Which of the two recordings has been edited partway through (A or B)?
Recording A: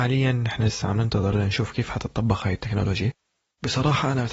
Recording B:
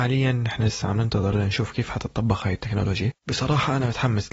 B